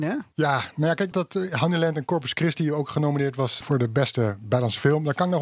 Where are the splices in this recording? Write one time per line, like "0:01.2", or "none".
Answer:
0:01.1
0:03.6